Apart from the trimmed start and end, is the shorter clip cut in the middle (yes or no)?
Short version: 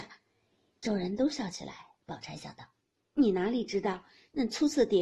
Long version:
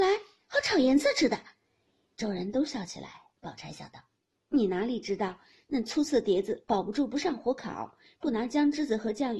no